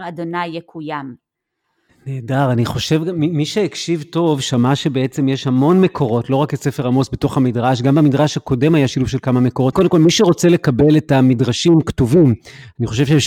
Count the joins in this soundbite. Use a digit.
2